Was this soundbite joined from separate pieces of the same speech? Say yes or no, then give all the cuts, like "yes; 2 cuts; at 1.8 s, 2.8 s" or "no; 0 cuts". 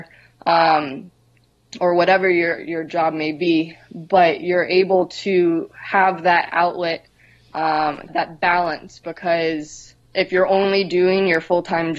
yes; 2 cuts; at 8.1 s, 10.0 s